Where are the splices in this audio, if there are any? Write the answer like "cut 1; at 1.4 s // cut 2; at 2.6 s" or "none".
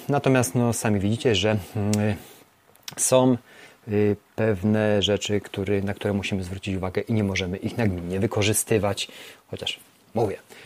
none